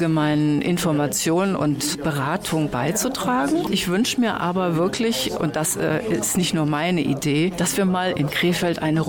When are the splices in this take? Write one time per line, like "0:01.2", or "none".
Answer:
none